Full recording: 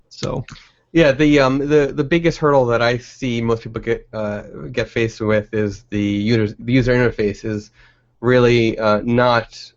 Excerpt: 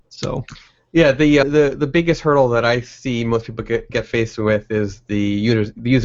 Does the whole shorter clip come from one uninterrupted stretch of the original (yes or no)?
no